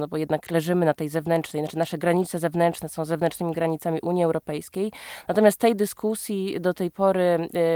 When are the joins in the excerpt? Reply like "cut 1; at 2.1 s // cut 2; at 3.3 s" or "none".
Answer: none